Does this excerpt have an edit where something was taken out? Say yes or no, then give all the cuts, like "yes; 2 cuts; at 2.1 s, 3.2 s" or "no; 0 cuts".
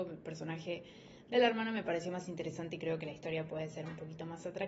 no; 0 cuts